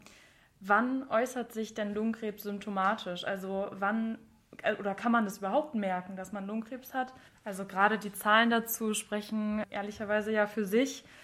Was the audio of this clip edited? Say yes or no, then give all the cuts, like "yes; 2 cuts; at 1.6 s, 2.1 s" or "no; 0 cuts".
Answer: yes; 1 cut; at 7.3 s